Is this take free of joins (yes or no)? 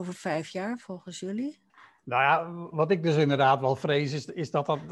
no